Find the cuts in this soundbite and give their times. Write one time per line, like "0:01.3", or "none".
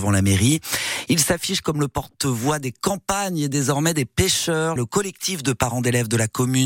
0:01.1
0:04.8